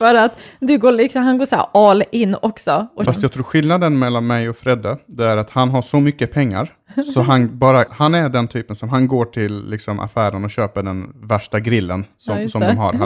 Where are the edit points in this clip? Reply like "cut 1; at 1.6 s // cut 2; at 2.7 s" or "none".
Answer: cut 1; at 3.0 s // cut 2; at 7.9 s